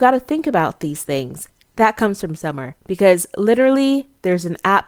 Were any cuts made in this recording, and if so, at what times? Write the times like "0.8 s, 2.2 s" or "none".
1.6 s

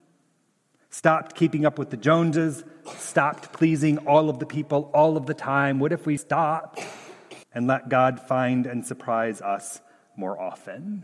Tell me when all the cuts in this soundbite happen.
6.2 s, 7.4 s

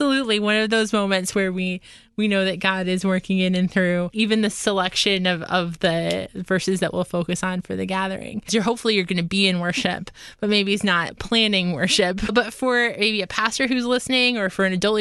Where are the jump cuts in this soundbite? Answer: 8.5 s

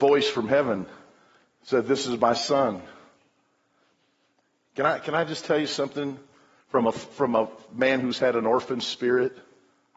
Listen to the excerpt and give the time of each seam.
none

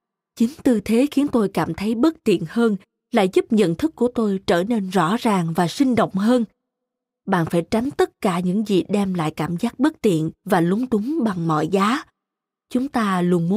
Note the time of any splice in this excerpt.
none

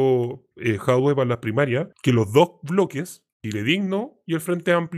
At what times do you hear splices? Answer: 1.9 s, 3.3 s

